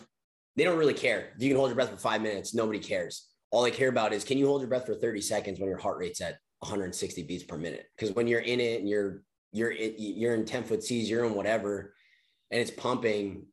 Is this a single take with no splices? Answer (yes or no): no